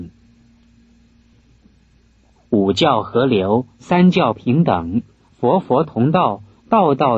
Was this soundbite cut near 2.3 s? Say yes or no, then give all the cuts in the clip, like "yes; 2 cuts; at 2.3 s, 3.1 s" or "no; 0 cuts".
yes; 1 cut; at 2.3 s